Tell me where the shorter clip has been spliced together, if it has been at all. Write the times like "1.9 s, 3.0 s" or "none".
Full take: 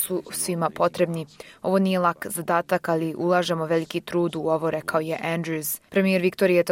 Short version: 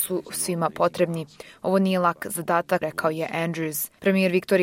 2.8 s